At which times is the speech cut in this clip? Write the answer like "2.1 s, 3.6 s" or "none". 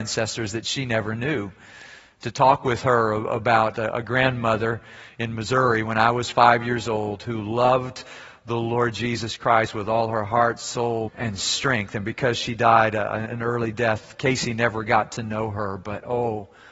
11.1 s